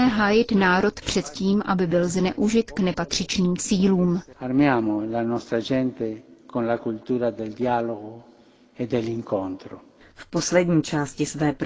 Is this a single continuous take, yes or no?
no